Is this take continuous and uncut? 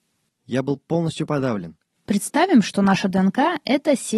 no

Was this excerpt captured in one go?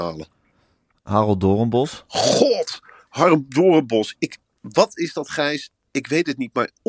yes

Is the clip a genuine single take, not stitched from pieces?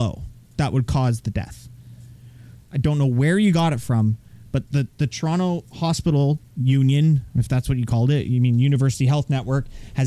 no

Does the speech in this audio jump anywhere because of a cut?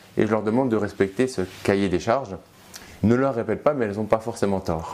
yes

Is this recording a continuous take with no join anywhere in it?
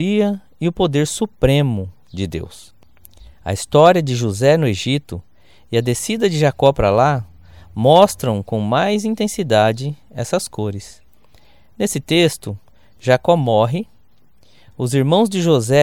yes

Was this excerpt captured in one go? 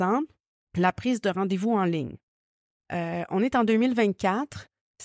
yes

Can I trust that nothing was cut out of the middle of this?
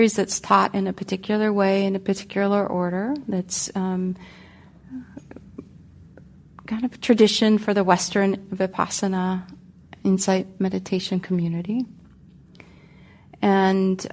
yes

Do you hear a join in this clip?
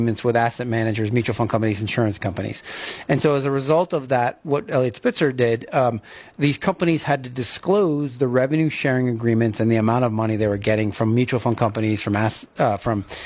no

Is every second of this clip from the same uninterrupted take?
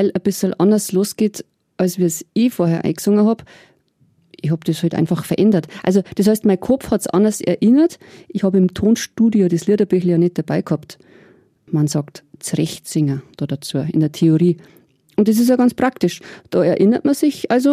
yes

